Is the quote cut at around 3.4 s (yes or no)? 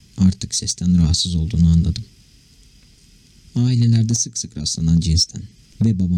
yes